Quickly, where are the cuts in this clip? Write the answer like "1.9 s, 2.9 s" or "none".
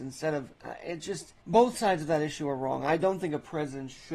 1.4 s